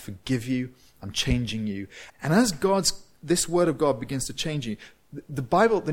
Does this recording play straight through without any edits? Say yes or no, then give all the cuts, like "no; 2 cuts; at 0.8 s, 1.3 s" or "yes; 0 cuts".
no; 1 cut; at 2.1 s